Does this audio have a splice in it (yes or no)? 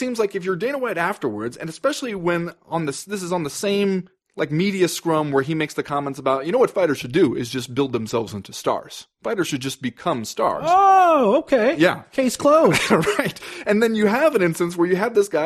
no